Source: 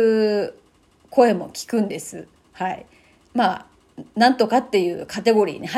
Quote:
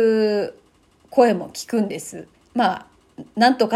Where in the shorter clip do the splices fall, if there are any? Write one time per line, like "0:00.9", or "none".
0:02.3